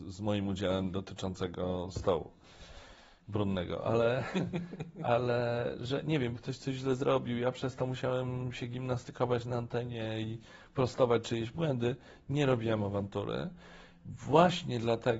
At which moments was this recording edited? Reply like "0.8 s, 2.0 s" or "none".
6.3 s